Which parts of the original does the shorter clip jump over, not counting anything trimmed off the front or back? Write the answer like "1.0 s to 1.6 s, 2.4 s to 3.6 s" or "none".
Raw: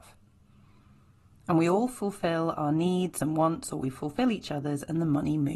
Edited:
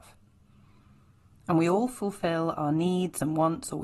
none